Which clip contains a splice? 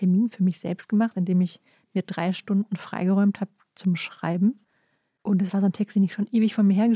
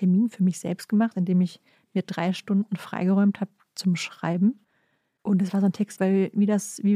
second; 1 cut; at 6.0 s

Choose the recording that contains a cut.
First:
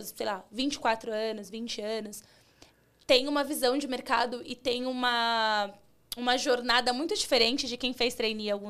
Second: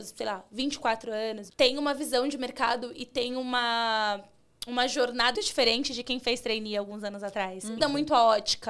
second; 3 cuts; at 1.5 s, 5.4 s, 7.8 s

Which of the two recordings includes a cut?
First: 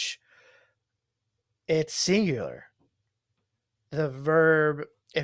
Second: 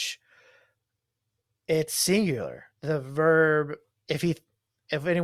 second; 2 cuts; at 2.7 s, 3.9 s

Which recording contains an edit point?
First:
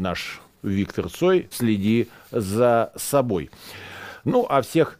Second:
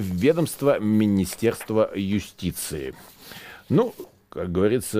first; 1 cut; at 1.5 s

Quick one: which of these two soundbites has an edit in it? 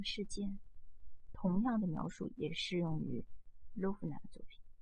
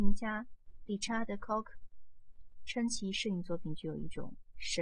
first; 1 cut; at 1.3 s

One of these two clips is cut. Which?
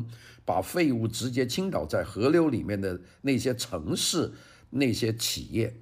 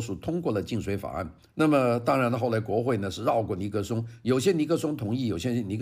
second; 1 cut; at 1.5 s

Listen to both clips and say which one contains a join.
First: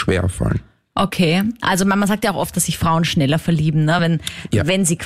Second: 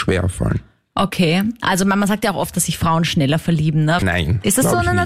second; 1 cut; at 4.0 s

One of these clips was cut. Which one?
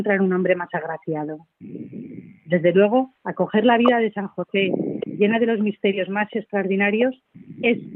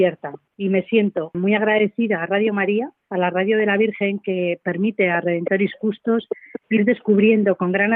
second; 1 cut; at 1.3 s

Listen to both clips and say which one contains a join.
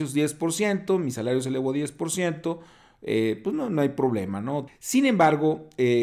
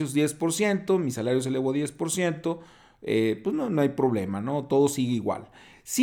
first; 1 cut; at 4.7 s

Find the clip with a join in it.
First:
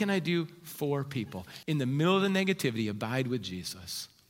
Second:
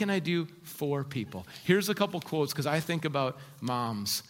first; 1 cut; at 1.6 s

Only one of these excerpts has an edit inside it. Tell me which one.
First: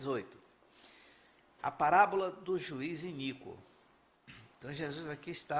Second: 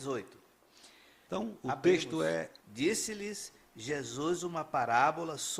second; 2 cuts; at 1.3 s, 2.6 s

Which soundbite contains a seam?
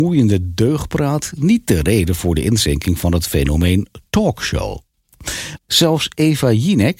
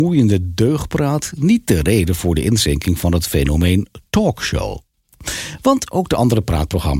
first; 1 cut; at 5.6 s

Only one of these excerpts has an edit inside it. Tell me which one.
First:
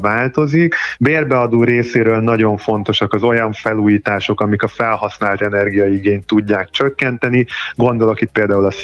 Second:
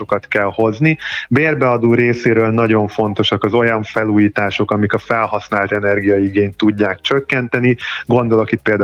first; 1 cut; at 1.0 s

